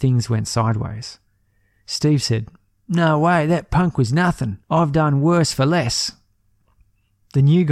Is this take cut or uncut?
cut